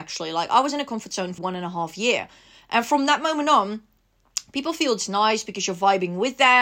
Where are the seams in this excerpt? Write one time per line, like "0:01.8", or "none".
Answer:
0:01.4